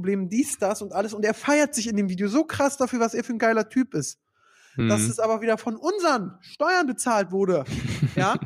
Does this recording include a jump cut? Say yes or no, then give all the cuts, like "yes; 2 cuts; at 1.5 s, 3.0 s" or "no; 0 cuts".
no; 0 cuts